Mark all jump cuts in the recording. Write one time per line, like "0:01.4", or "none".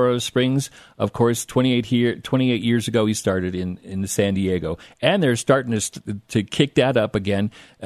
none